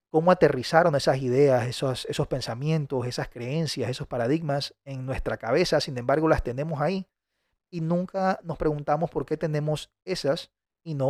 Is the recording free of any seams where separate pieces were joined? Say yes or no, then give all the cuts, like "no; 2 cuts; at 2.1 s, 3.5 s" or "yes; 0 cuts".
yes; 0 cuts